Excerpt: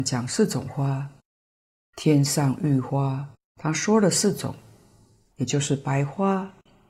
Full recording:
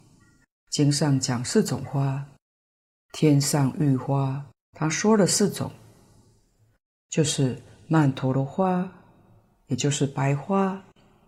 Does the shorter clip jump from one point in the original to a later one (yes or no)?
yes